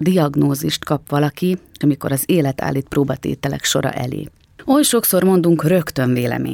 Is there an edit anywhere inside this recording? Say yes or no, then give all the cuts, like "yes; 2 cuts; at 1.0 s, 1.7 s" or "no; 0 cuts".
yes; 1 cut; at 1.8 s